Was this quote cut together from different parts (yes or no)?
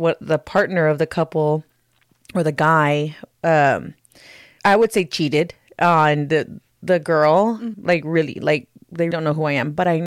yes